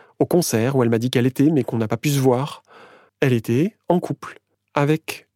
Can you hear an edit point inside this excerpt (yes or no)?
yes